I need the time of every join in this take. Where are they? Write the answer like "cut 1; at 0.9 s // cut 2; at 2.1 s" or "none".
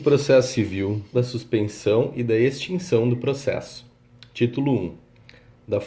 cut 1; at 1.1 s

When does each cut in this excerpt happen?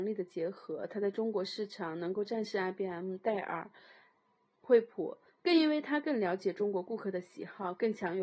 none

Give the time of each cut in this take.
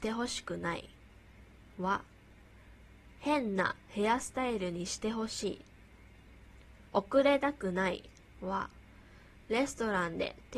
cut 1; at 6.9 s // cut 2; at 8.3 s

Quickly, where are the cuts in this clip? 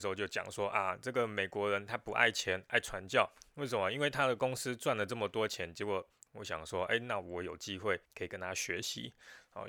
cut 1; at 6.3 s // cut 2; at 8.1 s

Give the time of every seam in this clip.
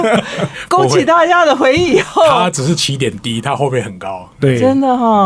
none

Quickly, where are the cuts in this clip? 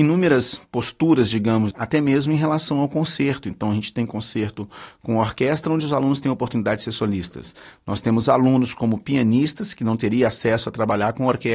cut 1; at 1.7 s

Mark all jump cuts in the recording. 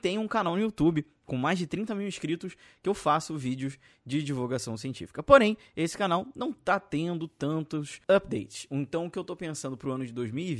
cut 1; at 8.0 s

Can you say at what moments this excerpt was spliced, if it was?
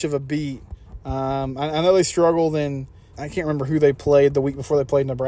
cut 1; at 3.1 s

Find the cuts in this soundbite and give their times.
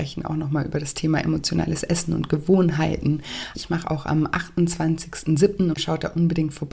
cut 1; at 3.5 s // cut 2; at 5.7 s

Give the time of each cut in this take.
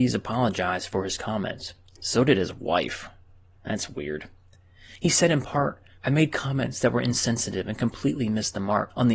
cut 1; at 6.0 s

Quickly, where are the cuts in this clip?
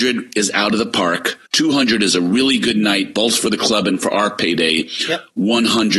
cut 1; at 1.5 s

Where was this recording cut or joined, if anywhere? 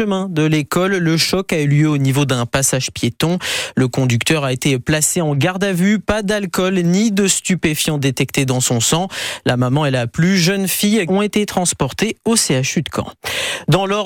cut 1; at 11.1 s

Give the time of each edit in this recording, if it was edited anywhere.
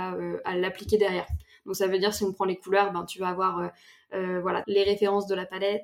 cut 1; at 4.6 s

